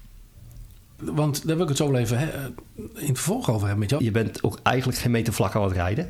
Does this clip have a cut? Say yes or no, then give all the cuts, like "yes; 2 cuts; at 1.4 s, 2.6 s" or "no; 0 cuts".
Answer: yes; 2 cuts; at 1.0 s, 4.0 s